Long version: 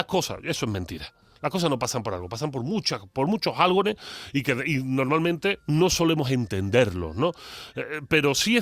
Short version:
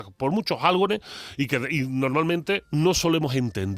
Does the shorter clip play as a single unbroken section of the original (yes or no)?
yes